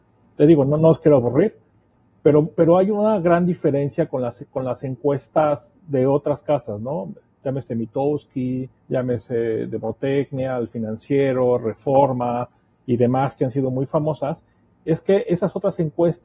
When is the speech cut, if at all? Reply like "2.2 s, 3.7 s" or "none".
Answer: 8.8 s